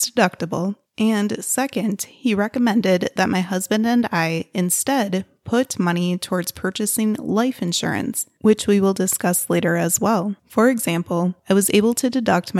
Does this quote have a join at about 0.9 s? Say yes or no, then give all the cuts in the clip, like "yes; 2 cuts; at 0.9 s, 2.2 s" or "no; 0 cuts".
no; 1 cut; at 10.4 s